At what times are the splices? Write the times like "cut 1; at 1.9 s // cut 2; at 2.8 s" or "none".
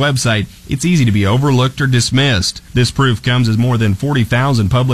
cut 1; at 2.7 s